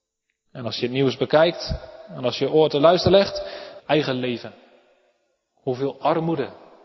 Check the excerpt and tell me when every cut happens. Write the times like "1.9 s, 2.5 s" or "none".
3.8 s